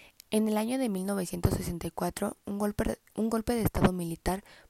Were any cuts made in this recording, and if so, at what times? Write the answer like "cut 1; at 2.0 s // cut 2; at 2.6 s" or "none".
none